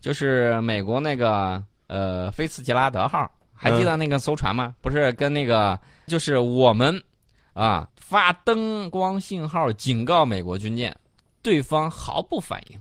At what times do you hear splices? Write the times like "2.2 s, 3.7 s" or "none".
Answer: 6.1 s, 7.9 s